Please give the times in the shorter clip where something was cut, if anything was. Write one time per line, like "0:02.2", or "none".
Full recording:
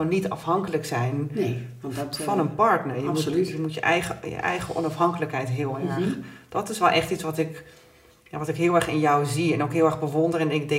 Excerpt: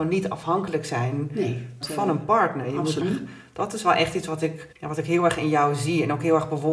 0:01.8
0:03.0
0:04.7